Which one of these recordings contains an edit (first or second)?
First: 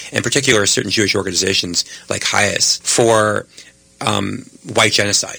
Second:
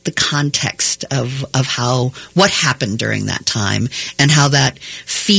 first